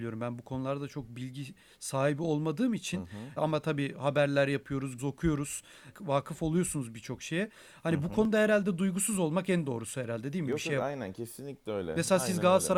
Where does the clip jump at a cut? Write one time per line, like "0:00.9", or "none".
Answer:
0:05.0